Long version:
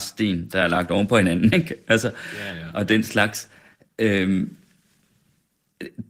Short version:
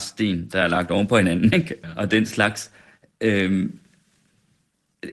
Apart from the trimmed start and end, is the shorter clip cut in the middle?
yes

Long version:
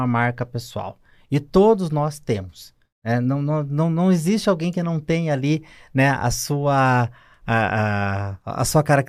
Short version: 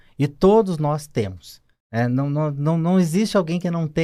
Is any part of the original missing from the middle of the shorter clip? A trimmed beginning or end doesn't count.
no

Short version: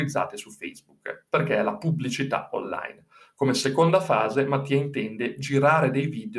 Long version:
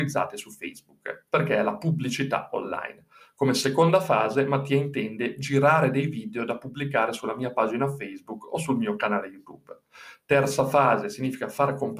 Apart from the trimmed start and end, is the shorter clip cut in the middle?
no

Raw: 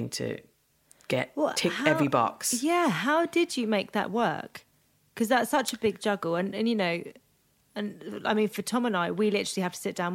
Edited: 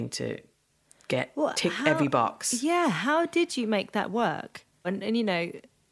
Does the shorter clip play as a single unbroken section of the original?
no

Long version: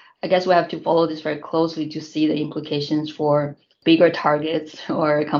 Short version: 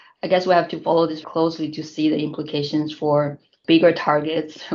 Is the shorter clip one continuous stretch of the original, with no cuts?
no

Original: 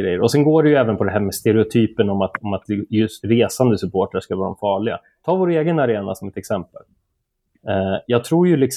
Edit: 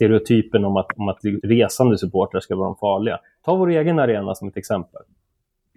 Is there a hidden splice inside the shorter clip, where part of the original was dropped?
yes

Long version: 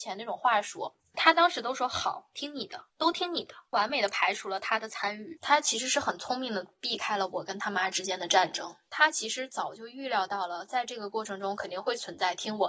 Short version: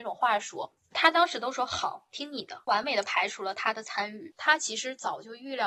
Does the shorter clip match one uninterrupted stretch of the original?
no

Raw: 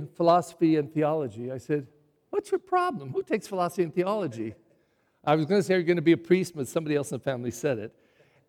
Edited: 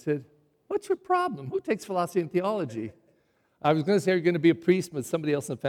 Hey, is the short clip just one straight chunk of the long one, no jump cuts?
yes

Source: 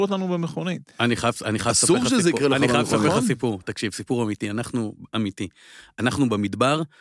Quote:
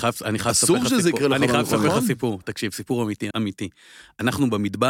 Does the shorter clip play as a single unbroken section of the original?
no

